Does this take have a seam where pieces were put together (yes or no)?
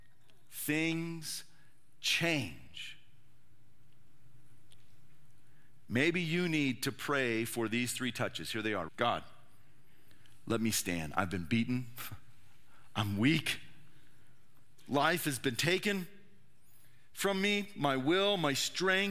yes